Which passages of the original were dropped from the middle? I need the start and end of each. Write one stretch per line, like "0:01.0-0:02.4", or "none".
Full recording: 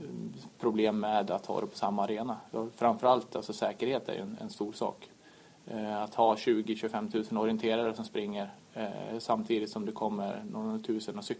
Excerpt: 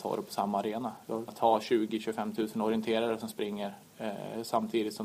0:02.7-0:06.0